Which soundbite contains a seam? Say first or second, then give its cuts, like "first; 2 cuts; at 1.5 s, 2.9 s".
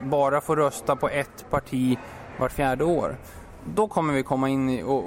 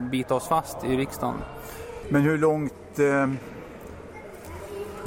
second; 1 cut; at 2.0 s